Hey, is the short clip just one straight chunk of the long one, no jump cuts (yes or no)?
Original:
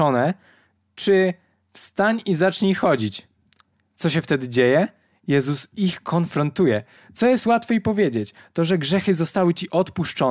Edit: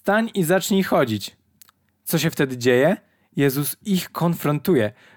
yes